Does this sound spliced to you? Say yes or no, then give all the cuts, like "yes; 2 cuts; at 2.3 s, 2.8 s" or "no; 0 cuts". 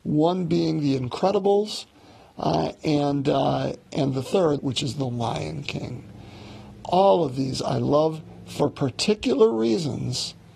yes; 1 cut; at 4.6 s